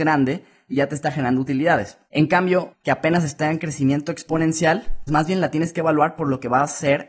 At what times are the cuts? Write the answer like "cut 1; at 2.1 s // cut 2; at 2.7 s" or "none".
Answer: cut 1; at 2.7 s // cut 2; at 5.1 s